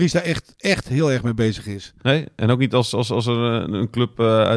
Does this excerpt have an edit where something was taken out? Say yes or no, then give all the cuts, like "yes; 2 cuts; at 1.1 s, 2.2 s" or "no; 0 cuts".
no; 0 cuts